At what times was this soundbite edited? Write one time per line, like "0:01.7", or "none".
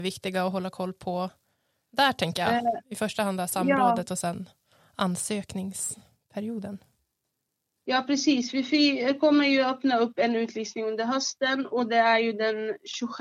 none